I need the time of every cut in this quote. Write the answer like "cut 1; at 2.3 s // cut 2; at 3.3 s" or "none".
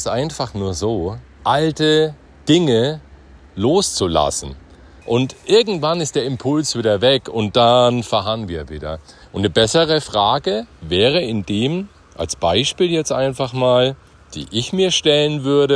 cut 1; at 1.4 s // cut 2; at 5.0 s // cut 3; at 9.2 s